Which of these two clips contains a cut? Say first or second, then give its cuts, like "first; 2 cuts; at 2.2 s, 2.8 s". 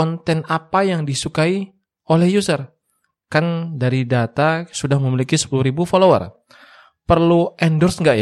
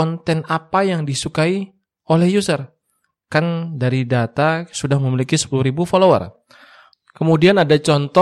second; 1 cut; at 6.9 s